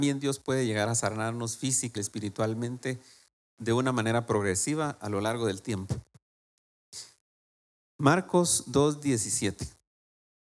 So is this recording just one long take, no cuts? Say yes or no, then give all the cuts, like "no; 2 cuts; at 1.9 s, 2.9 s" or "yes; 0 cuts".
no; 1 cut; at 2.0 s